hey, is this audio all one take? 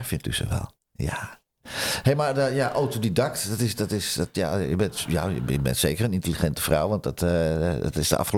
yes; 0 cuts

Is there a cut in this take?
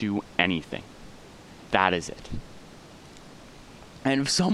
yes; 1 cut; at 1.7 s

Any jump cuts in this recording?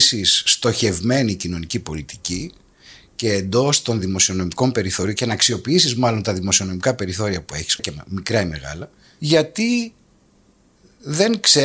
yes; 1 cut; at 7.8 s

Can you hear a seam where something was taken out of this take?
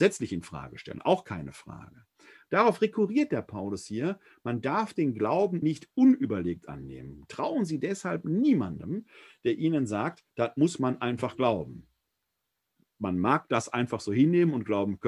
yes; 1 cut; at 5.6 s

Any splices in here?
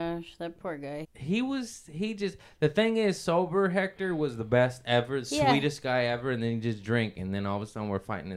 yes; 1 cut; at 1.0 s

